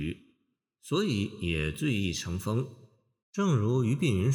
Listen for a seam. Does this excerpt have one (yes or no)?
yes